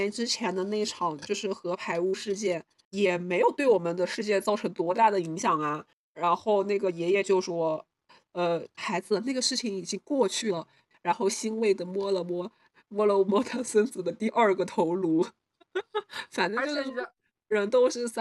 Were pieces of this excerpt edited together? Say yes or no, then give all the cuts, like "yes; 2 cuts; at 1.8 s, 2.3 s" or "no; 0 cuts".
yes; 1 cut; at 8.8 s